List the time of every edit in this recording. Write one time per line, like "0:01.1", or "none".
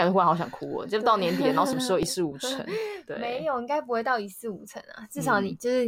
none

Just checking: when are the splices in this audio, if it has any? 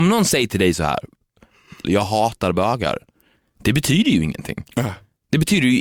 0:01.8

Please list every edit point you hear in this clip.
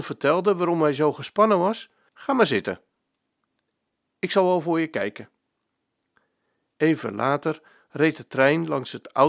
0:02.1

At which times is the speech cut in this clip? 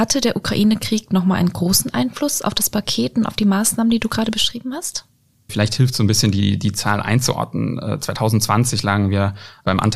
0:05.5

